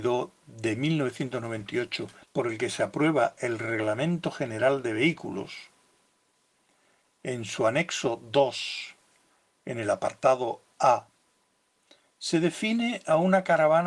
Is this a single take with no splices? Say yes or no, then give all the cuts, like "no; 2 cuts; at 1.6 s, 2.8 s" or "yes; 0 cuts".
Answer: no; 1 cut; at 2.2 s